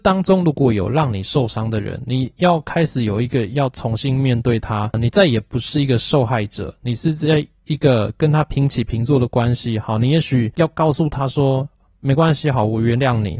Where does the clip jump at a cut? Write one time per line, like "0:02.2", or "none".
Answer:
none